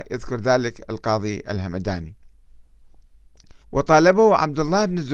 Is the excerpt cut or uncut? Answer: cut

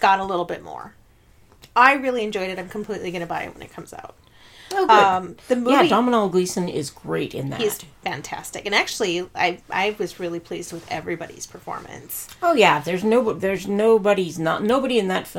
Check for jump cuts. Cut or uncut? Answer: uncut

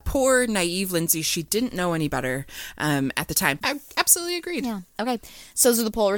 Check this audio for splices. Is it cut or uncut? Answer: cut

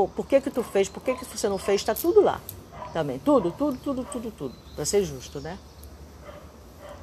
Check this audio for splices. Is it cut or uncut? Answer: uncut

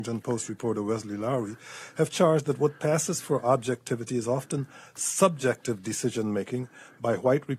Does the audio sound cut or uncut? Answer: uncut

